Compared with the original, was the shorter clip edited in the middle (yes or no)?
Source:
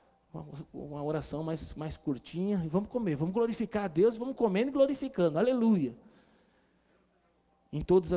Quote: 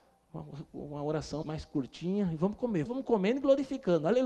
yes